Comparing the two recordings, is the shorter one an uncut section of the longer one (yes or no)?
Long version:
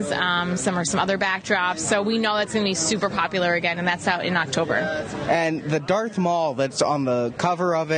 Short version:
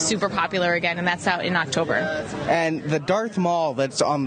yes